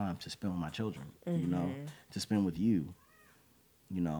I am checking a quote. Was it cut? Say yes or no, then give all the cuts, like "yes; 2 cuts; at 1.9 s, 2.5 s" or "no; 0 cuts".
no; 0 cuts